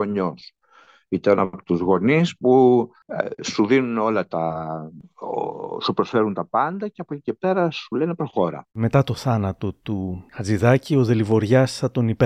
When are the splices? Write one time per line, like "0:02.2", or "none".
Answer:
0:08.7